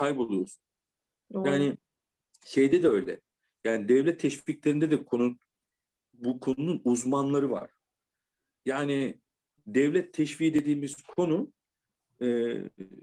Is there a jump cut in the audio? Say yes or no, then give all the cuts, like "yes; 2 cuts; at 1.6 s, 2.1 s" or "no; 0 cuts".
no; 0 cuts